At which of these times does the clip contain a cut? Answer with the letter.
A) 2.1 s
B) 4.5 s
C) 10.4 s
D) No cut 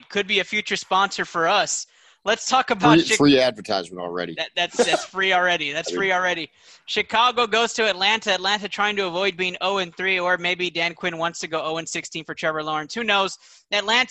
D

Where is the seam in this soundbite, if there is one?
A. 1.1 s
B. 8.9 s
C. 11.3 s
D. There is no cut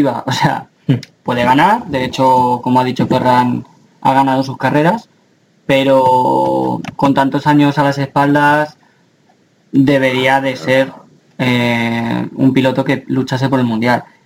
A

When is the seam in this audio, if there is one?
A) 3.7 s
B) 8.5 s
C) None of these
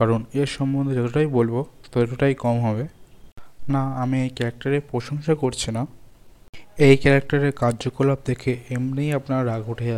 A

